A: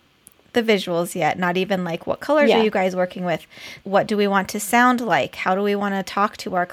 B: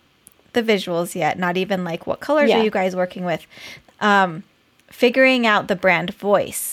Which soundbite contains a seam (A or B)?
A